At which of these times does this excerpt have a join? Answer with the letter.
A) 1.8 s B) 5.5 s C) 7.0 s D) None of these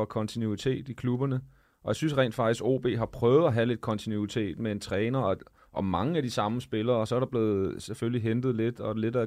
D